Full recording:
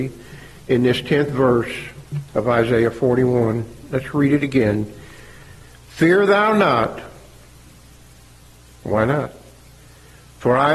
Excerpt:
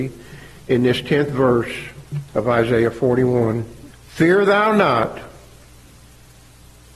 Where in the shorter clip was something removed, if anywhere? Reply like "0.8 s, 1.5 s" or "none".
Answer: 3.9 s